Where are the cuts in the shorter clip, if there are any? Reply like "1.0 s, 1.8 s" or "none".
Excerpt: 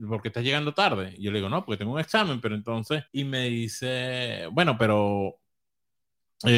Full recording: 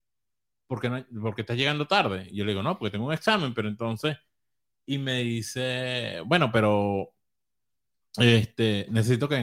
3.1 s

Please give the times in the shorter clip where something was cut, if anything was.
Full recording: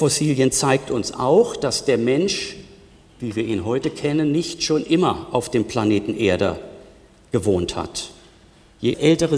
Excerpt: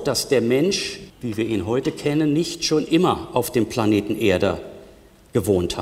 1.1 s

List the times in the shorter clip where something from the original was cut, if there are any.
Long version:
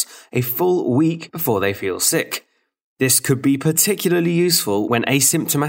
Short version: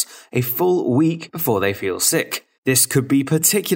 2.5 s

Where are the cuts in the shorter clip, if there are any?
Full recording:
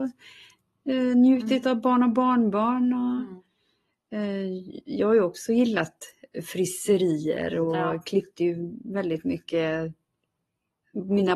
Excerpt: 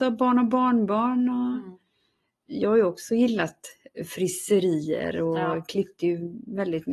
2.5 s

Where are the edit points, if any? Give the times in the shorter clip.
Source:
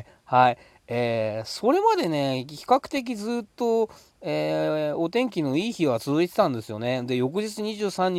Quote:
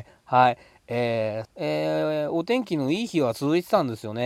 1.4 s

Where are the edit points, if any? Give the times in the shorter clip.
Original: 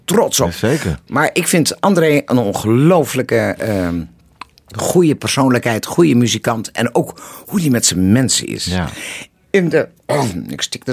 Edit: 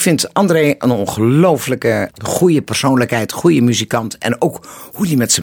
2.1 s

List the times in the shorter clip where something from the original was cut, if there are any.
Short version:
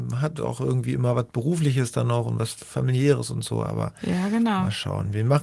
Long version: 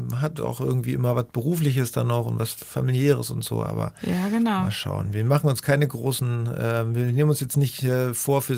none

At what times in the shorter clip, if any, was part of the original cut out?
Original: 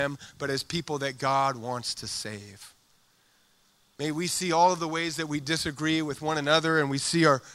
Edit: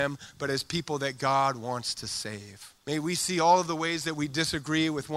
2.8 s

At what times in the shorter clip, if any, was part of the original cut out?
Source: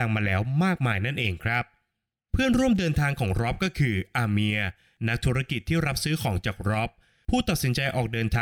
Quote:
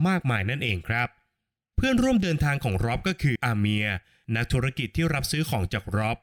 3.4 s

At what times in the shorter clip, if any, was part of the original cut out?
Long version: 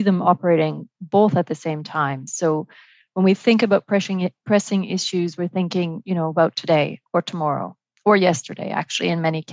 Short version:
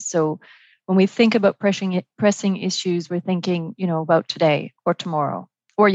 none

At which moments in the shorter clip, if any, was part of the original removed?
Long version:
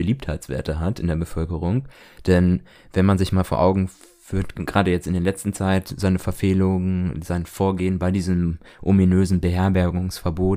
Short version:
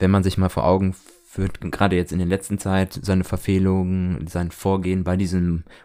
none

